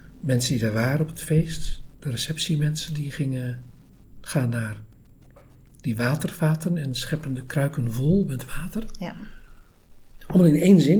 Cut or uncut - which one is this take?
uncut